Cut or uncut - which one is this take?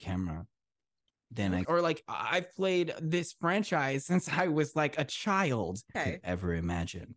cut